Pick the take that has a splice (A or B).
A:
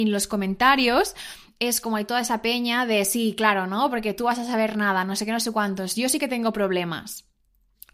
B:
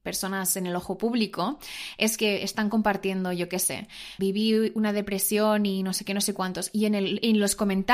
B